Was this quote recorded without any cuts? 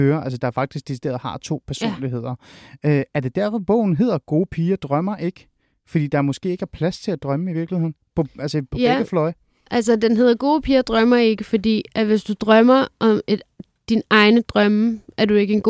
yes; 0 cuts

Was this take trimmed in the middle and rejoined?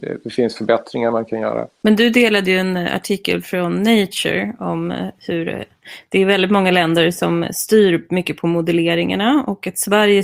no; 0 cuts

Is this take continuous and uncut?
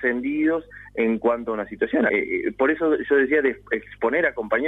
no; 1 cut; at 2.1 s

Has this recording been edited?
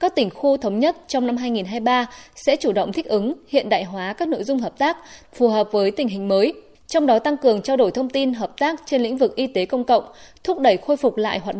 yes; 1 cut; at 5.2 s

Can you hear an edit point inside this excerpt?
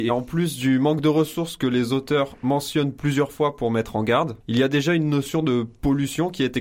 yes; 1 cut; at 4.4 s

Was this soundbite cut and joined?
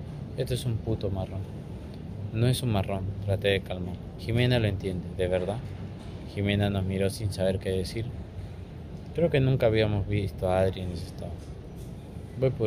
yes; 1 cut; at 4.2 s

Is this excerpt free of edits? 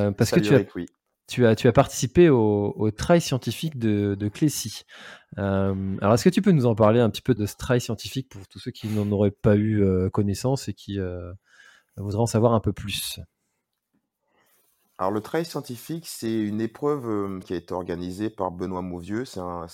no; 2 cuts; at 7.4 s, 17.4 s

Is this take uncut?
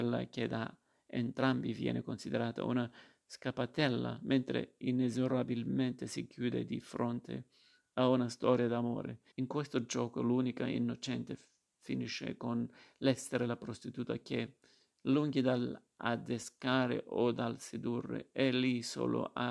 no; 1 cut; at 9.3 s

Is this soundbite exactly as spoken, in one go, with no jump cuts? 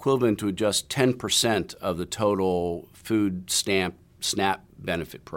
yes; 0 cuts

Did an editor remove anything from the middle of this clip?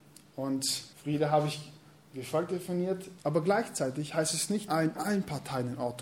yes; 3 cuts; at 0.9 s, 3.2 s, 4.7 s

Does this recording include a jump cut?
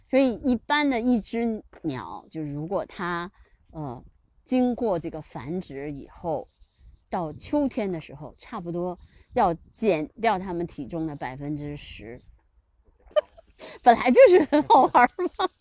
yes; 1 cut; at 13.1 s

